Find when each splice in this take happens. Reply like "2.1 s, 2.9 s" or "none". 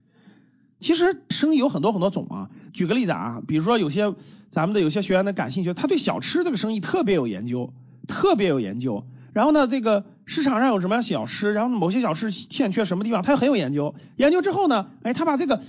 none